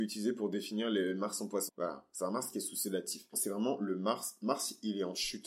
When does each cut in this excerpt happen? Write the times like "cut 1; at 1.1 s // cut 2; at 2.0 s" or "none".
cut 1; at 1.7 s // cut 2; at 3.3 s